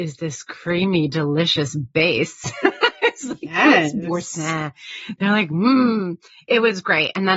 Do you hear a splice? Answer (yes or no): no